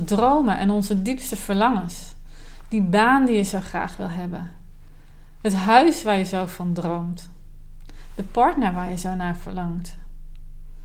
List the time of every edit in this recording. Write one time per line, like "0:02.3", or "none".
none